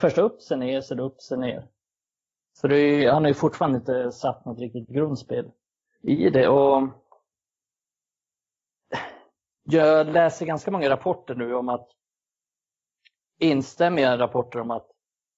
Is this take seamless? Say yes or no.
yes